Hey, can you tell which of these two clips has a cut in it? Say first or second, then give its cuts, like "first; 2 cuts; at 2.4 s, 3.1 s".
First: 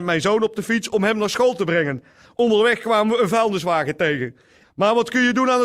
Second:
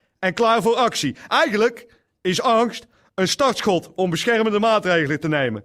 first; 1 cut; at 4.6 s